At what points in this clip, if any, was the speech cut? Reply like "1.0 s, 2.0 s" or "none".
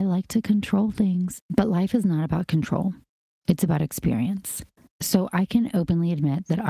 1.4 s, 4.9 s